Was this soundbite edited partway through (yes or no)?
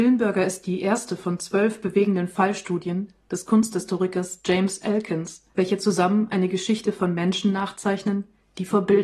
yes